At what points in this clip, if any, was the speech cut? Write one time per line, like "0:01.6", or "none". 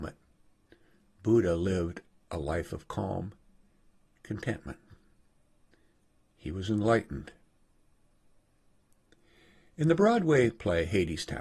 none